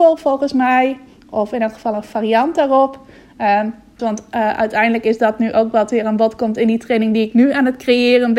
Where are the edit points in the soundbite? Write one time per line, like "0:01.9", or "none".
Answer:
0:04.0